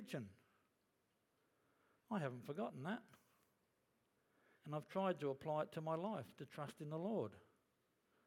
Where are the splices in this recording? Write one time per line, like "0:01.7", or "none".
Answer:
0:04.6

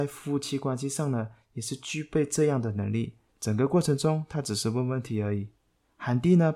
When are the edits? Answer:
0:03.3

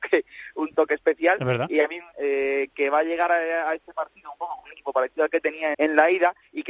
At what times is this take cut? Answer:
0:02.1
0:05.7

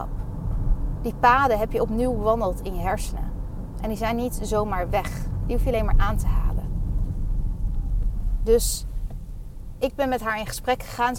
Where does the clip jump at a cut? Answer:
0:05.9

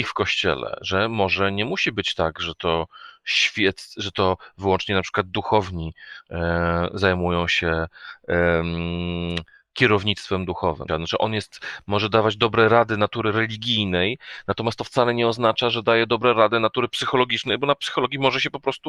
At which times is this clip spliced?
0:10.9

